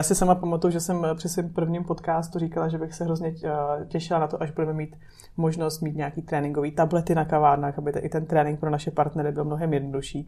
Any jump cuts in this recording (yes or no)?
no